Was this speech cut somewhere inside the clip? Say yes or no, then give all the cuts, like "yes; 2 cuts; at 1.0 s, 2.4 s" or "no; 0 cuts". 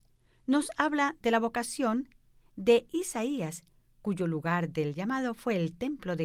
no; 0 cuts